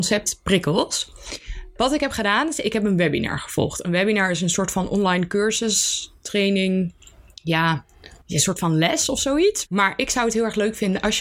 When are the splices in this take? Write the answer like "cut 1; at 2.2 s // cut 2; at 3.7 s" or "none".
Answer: cut 1; at 8.2 s // cut 2; at 9.6 s

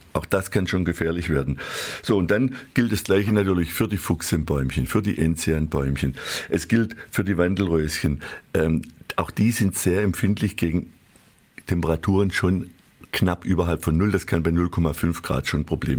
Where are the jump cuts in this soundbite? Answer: none

